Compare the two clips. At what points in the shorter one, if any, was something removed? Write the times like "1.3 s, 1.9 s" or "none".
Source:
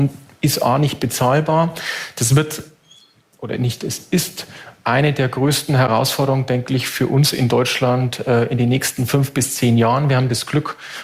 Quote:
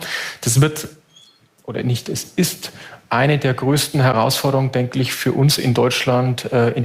none